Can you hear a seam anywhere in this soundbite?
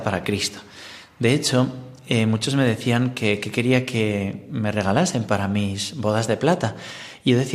no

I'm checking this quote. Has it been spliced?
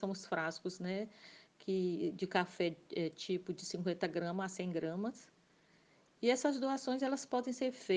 no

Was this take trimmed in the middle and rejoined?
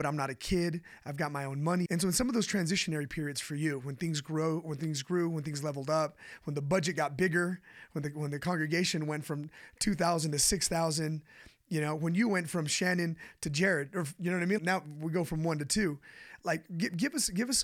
yes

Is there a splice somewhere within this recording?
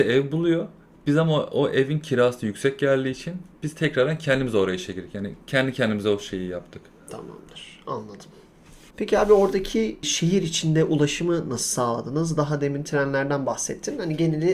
no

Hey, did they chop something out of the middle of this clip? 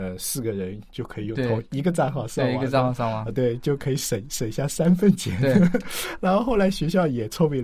no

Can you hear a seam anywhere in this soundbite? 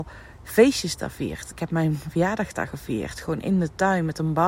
no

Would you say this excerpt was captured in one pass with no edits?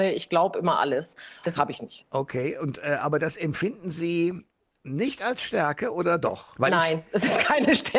no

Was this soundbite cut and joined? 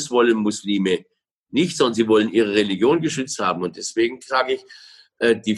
no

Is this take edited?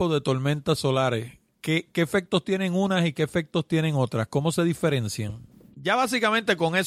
yes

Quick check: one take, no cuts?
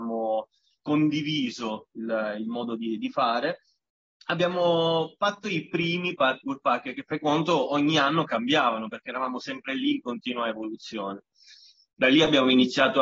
yes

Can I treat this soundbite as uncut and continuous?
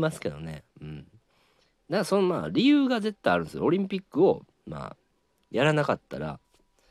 yes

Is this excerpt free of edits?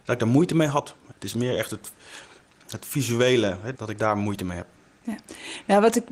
no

